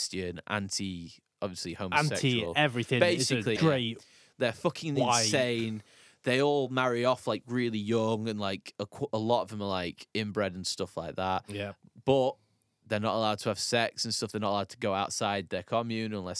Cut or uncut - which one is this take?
cut